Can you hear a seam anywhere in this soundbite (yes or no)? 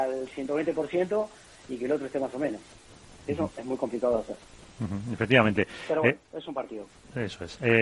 no